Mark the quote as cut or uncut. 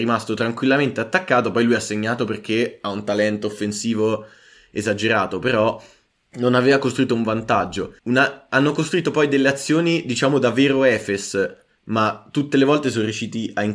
cut